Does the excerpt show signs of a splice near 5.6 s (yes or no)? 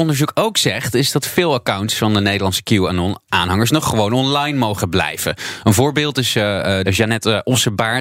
no